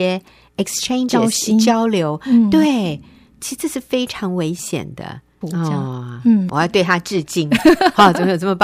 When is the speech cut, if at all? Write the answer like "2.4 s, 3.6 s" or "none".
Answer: 5.4 s, 6.5 s

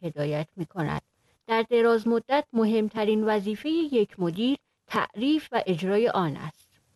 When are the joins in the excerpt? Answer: none

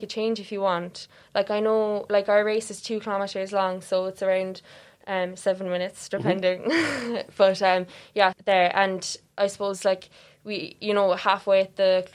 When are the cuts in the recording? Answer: 8.3 s

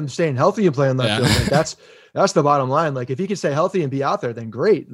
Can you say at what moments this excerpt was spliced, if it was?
none

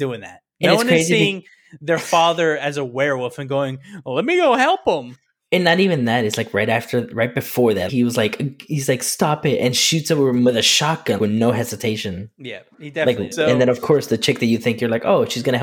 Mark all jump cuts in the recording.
7.9 s, 11.2 s, 13.3 s

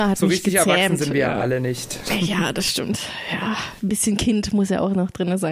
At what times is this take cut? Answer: none

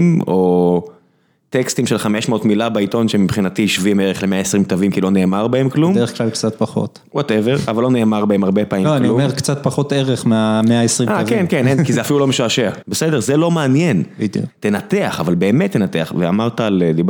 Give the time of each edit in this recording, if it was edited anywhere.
12.8 s, 14.5 s

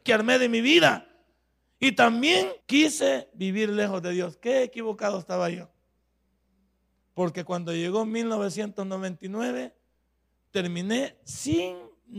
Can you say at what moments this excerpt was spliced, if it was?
2.6 s

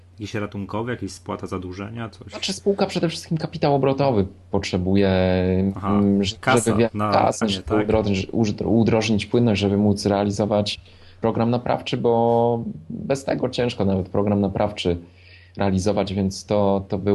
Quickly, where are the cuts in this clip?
7.4 s

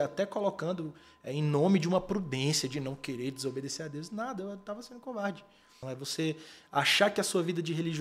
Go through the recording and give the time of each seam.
5.8 s

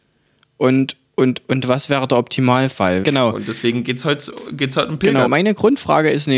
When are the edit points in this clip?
3.0 s, 5.3 s

